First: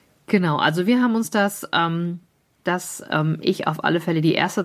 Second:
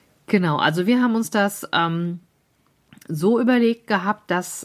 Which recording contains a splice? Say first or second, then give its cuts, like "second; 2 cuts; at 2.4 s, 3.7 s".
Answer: first; 1 cut; at 2.6 s